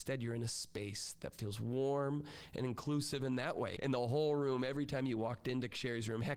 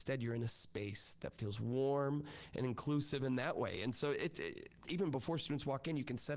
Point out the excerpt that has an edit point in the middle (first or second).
first